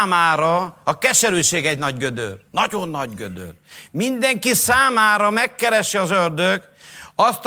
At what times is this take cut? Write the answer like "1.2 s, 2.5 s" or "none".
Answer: 2.5 s